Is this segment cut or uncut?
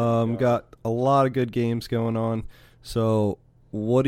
uncut